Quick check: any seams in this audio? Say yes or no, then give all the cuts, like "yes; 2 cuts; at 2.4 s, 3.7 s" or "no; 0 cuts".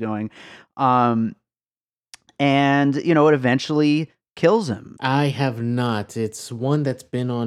yes; 1 cut; at 5.0 s